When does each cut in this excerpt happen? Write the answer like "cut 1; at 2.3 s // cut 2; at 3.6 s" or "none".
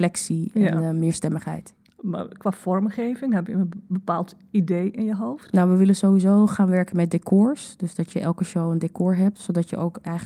none